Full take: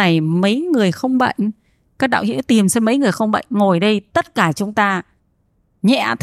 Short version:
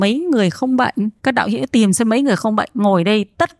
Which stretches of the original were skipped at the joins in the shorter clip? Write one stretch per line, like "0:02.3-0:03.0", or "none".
0:01.6-0:01.9